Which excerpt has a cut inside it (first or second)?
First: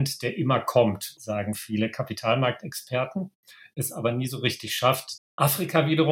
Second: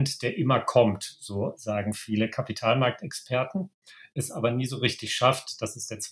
first